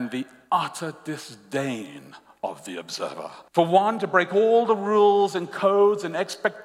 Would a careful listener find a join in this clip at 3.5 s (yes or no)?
yes